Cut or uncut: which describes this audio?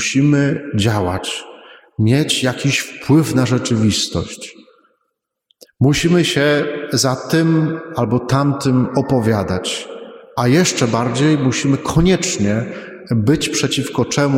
uncut